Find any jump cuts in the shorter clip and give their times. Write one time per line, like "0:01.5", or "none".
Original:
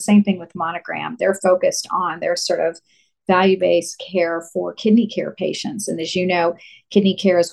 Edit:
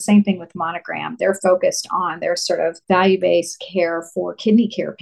0:02.8